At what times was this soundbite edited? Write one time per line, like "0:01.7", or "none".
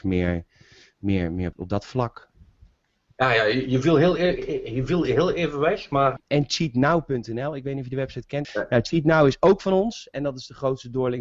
0:01.5
0:06.2
0:08.4